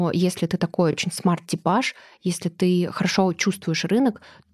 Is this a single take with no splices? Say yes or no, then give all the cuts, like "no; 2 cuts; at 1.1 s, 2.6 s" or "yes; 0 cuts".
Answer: yes; 0 cuts